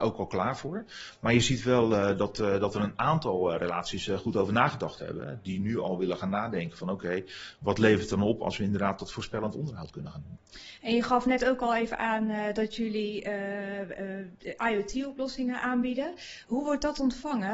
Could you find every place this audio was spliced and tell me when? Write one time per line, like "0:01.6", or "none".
0:16.4